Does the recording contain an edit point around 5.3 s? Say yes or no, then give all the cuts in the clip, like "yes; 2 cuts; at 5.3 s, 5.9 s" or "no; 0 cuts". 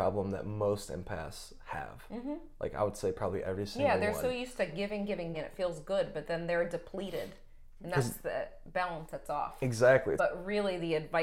yes; 2 cuts; at 5.3 s, 10.2 s